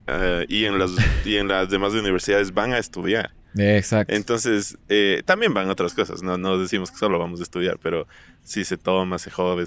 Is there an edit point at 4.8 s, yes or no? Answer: no